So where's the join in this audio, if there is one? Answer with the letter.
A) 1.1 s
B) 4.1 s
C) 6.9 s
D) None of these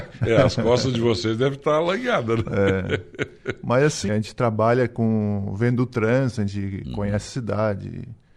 B